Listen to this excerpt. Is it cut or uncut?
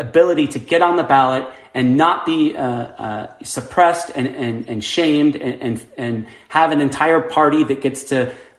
uncut